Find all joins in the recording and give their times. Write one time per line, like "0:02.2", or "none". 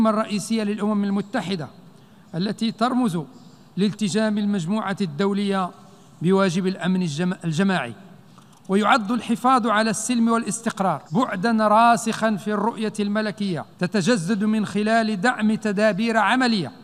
0:11.1
0:13.7